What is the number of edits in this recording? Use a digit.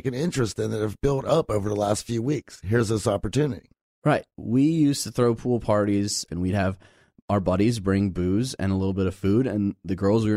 1